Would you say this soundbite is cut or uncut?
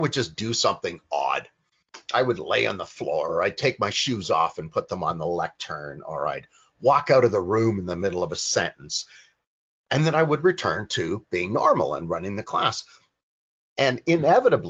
uncut